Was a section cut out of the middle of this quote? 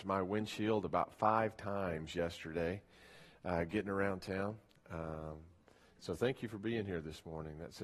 no; 0 cuts

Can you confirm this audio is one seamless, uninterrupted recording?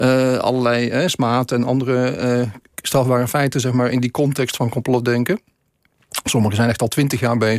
yes; 0 cuts

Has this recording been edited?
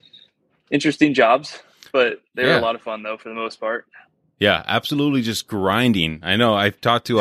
no; 0 cuts

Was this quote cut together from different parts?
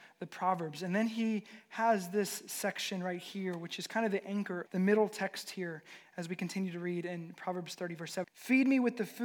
yes; 2 cuts; at 4.7 s, 8.2 s

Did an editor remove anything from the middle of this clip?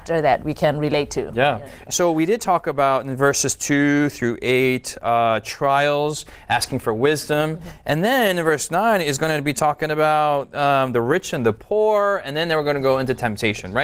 yes; 1 cut; at 1.8 s

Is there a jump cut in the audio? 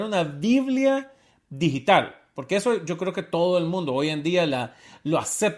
no; 0 cuts

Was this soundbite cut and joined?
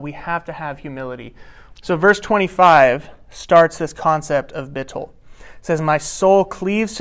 yes; 1 cut; at 1.7 s

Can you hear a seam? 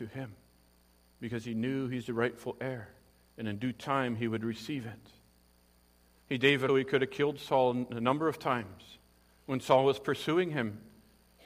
yes; 1 cut; at 6.7 s

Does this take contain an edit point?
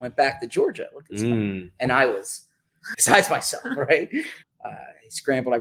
yes; 2 cuts; at 2.9 s, 4.4 s

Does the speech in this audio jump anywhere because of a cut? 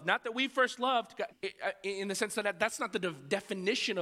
yes; 1 cut; at 1.3 s

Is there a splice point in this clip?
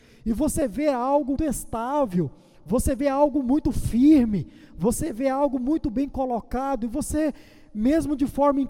yes; 1 cut; at 1.4 s

